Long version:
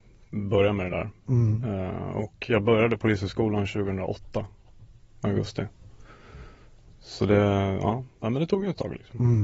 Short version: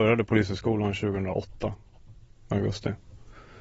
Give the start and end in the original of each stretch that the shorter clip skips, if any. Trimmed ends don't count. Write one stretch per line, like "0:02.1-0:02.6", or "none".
none